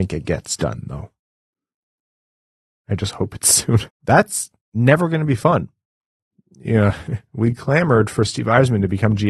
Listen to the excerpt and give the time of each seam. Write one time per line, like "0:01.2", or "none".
0:03.9

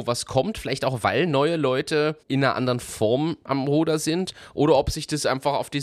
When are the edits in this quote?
0:02.2

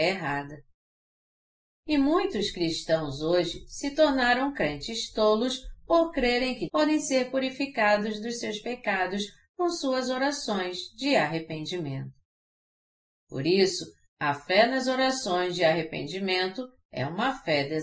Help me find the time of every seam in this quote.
0:06.7

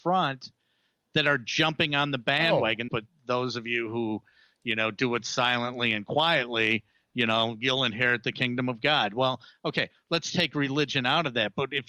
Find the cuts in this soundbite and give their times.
0:02.9

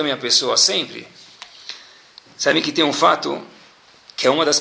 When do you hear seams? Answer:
none

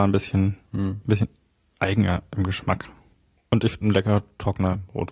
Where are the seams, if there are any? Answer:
0:03.8

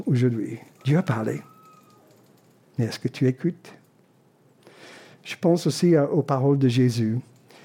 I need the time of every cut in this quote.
none

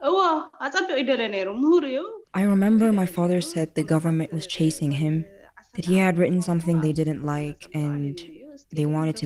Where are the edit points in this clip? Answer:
none

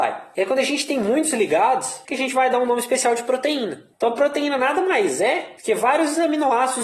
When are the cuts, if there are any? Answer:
0:02.1
0:03.9

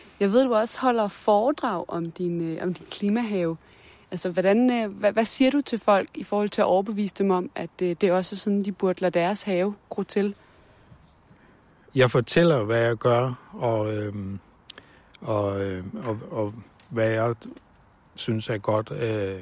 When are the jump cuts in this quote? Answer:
none

